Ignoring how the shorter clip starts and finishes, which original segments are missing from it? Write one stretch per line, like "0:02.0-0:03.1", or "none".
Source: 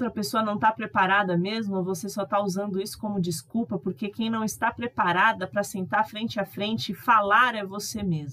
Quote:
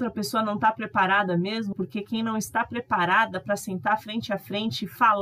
0:01.7-0:03.8

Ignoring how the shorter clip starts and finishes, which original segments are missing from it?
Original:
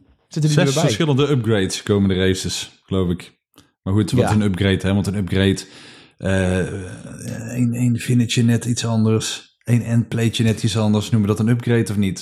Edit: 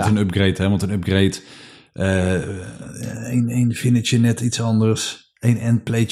none

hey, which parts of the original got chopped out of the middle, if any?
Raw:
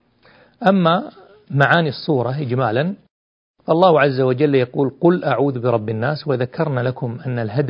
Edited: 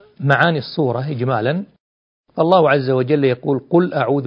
none

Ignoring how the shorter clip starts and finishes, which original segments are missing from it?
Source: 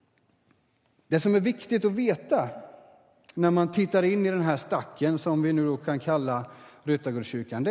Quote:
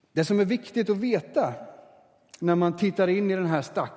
none

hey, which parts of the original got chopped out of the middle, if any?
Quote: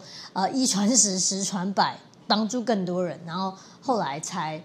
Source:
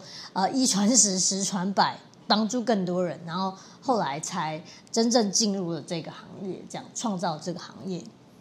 none

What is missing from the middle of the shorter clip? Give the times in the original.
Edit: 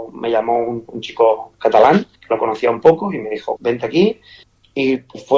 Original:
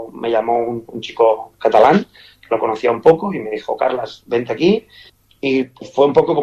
0:02.2-0:02.4
0:03.8-0:04.2

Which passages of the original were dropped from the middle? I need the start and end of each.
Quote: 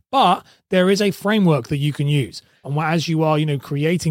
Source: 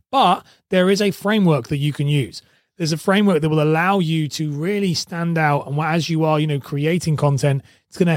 0:02.6-0:05.6

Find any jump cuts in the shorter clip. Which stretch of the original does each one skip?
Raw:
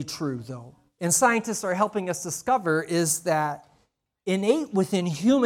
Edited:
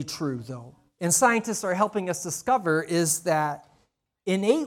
none

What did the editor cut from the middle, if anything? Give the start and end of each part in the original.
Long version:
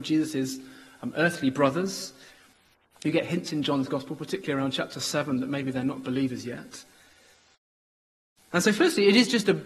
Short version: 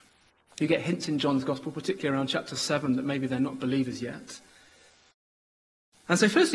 none

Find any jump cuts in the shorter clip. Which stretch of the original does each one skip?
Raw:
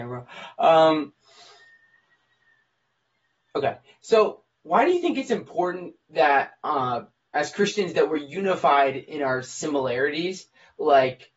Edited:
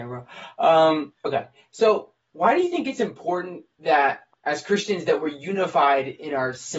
0:01.2-0:03.5
0:06.6-0:07.2

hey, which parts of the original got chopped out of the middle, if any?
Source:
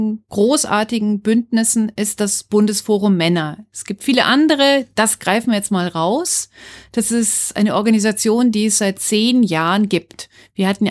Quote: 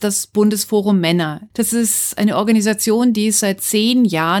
0:03.7-0:06.9

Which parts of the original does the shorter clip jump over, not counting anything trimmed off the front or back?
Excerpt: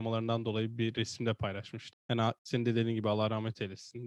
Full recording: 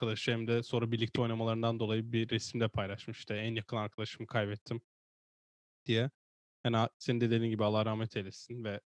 0:03.3-0:06.5

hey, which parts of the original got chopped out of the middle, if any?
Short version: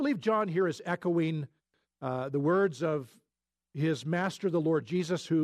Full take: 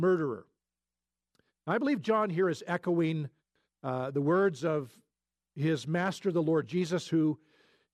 none

